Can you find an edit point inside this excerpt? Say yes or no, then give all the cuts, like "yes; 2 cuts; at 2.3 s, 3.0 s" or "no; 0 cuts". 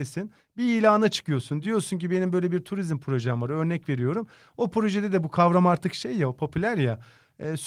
no; 0 cuts